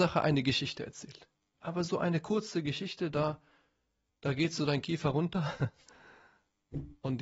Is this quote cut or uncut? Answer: cut